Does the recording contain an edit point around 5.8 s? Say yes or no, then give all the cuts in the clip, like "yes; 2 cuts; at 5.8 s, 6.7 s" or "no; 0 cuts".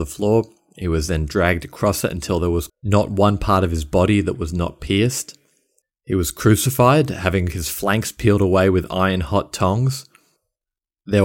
yes; 2 cuts; at 2.7 s, 5.8 s